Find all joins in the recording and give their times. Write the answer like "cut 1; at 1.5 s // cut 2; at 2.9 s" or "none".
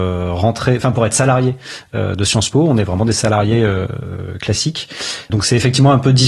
none